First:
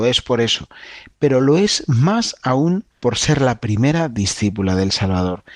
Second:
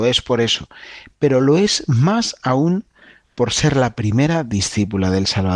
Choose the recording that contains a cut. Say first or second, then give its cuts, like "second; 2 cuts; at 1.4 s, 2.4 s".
first; 1 cut; at 2.9 s